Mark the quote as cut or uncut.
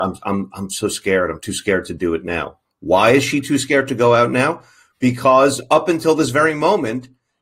uncut